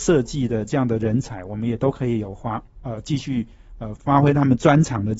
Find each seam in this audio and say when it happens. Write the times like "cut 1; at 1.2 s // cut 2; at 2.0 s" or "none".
cut 1; at 4.0 s